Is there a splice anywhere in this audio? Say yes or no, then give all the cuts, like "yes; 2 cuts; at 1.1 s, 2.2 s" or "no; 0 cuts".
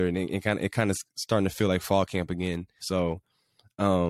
yes; 1 cut; at 2.8 s